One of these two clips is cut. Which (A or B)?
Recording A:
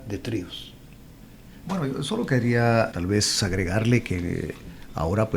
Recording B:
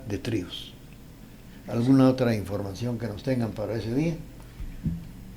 A